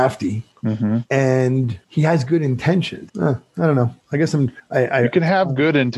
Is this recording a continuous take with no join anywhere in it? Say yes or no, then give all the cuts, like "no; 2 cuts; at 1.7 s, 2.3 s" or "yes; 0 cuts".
no; 1 cut; at 3.1 s